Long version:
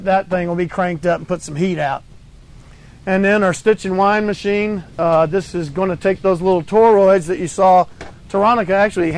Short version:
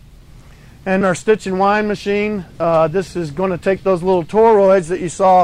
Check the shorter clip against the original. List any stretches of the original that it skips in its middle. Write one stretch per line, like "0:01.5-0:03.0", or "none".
0:03.2-0:03.4